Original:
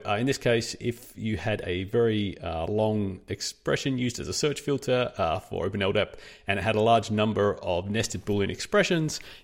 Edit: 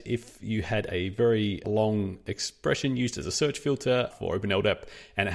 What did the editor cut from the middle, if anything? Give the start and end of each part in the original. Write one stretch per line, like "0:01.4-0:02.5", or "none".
0:02.4-0:02.7
0:05.1-0:05.4